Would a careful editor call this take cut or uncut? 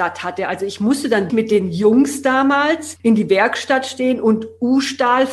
cut